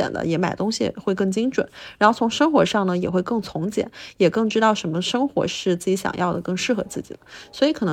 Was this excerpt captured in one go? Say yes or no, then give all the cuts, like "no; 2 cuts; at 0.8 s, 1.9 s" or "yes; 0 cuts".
yes; 0 cuts